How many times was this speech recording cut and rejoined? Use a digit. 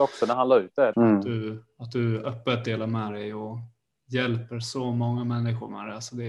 1